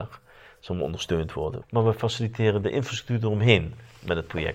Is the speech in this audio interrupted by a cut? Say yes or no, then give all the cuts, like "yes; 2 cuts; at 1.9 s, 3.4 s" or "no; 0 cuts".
yes; 1 cut; at 1.6 s